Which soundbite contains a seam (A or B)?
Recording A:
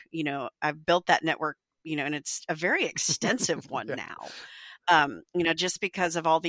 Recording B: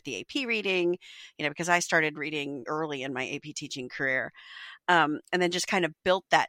B